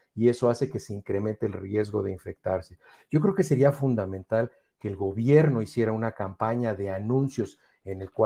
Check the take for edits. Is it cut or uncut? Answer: uncut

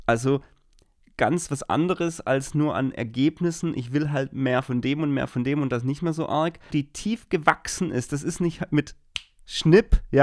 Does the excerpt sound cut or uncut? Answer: cut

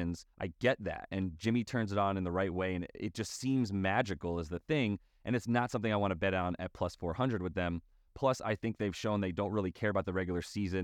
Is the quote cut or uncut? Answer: uncut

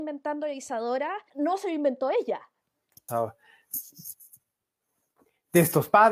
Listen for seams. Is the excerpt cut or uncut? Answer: cut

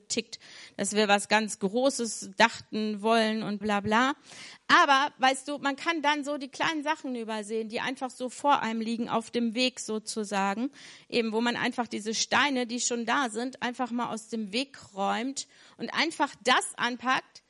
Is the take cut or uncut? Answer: cut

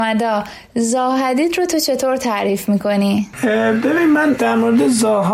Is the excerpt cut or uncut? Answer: uncut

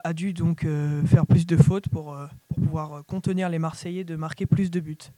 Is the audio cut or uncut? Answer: cut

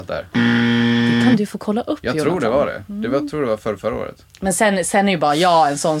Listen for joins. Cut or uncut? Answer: uncut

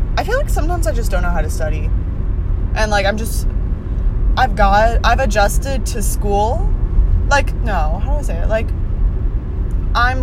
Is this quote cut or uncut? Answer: uncut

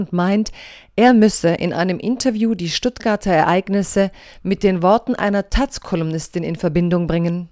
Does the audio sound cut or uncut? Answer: uncut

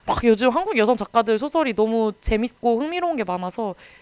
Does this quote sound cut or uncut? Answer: uncut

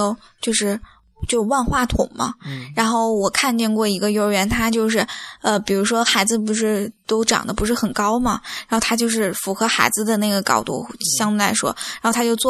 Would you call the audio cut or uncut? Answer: uncut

